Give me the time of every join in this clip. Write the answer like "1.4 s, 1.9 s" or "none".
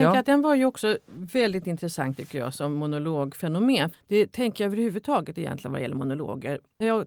3.9 s